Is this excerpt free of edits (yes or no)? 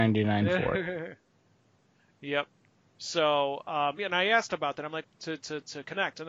no